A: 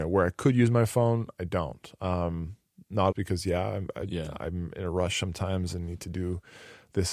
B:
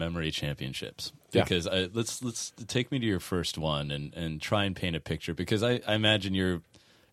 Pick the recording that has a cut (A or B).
A